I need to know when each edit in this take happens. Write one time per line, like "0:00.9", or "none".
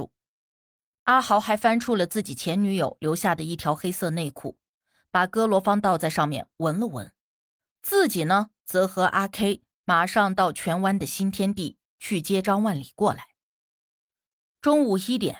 0:07.6